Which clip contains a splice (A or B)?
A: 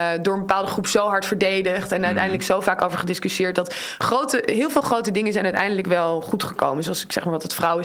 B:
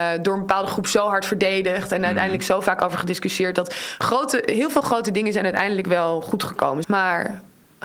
B